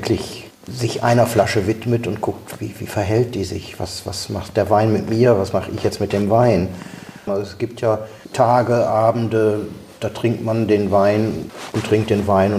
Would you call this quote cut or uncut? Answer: cut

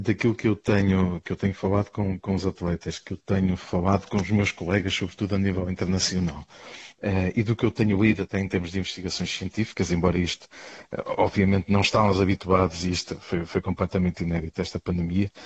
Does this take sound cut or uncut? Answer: uncut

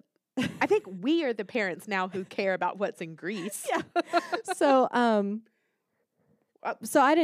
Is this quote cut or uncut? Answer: uncut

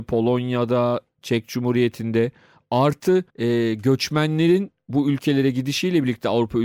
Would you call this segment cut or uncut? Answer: cut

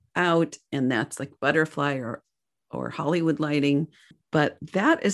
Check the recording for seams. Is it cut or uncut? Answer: uncut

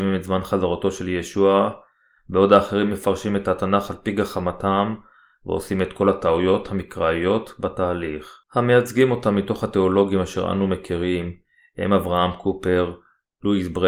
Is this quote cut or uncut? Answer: cut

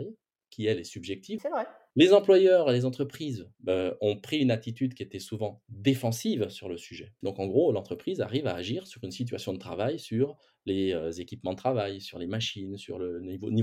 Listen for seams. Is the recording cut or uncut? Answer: cut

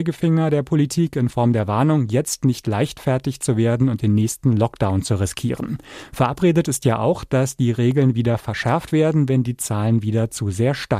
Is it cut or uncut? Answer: uncut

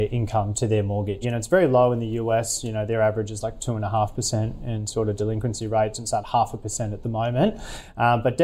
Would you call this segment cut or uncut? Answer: cut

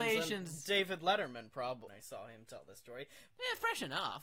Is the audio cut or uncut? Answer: cut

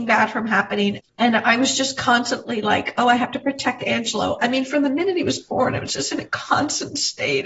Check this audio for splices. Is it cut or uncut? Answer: cut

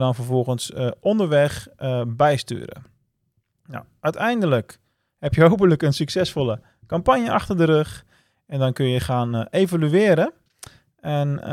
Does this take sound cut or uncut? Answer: uncut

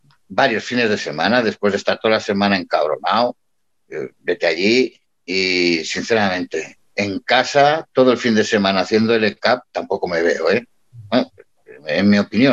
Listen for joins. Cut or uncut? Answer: uncut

